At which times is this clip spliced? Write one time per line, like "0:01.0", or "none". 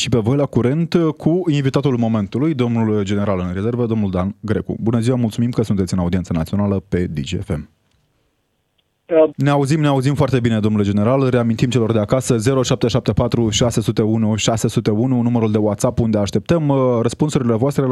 0:09.3